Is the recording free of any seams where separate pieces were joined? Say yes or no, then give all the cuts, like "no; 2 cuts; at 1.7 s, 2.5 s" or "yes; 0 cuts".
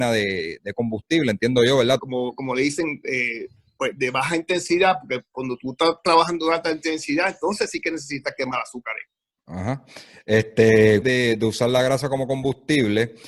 no; 2 cuts; at 2.0 s, 11.0 s